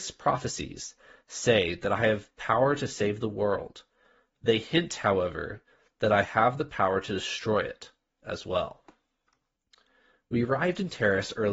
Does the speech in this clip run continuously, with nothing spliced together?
yes; 0 cuts

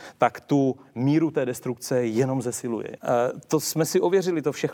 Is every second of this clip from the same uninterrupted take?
no; 1 cut; at 3.0 s

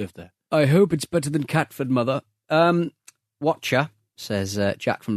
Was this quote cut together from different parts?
no; 0 cuts

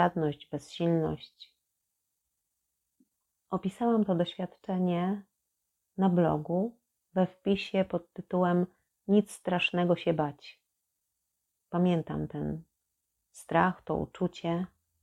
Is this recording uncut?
no; 1 cut; at 3.3 s

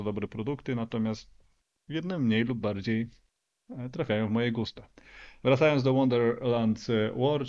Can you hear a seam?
no; 0 cuts

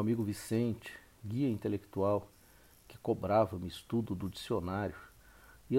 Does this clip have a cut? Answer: no; 0 cuts

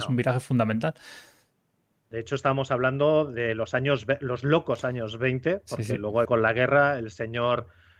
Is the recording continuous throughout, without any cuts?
no; 1 cut; at 6.3 s

